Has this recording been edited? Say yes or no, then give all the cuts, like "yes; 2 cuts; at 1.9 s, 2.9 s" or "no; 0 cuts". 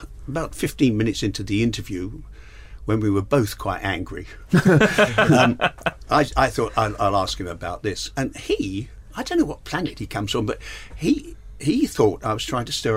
no; 0 cuts